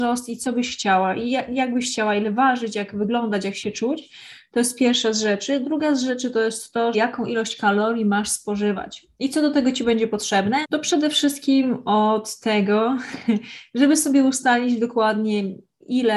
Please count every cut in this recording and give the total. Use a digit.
2